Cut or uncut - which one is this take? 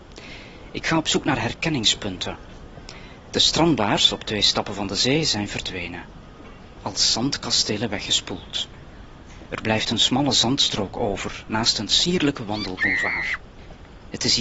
cut